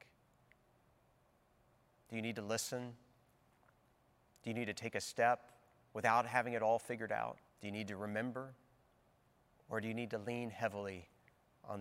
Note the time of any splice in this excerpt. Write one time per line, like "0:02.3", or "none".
0:07.5
0:09.6